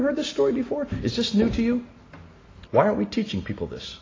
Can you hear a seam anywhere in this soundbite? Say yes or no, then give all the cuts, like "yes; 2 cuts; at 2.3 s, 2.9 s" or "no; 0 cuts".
yes; 1 cut; at 2.6 s